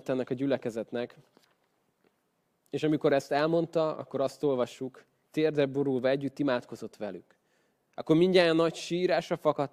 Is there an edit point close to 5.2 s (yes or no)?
yes